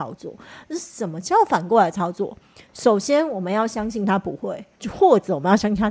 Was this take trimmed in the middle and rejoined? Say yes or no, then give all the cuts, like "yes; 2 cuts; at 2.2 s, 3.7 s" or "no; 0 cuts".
no; 0 cuts